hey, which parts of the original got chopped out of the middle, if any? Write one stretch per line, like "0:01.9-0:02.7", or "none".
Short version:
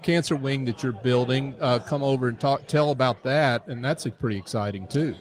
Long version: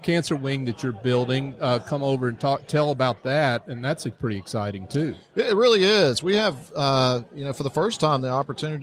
none